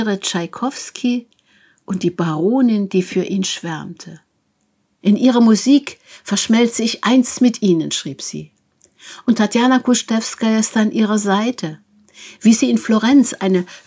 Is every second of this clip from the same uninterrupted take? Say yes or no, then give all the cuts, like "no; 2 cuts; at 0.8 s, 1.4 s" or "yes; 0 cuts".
no; 2 cuts; at 5.0 s, 12.4 s